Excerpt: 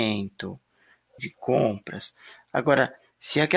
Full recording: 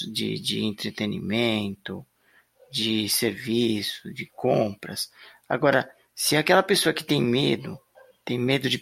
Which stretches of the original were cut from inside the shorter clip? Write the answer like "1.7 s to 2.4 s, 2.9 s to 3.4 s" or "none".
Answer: 2.6 s to 4.1 s